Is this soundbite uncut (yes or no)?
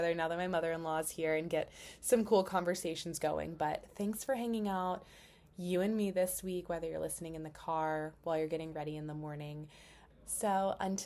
no